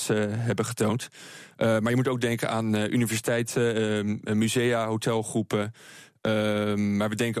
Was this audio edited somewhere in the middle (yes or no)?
no